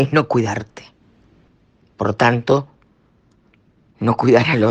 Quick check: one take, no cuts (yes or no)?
yes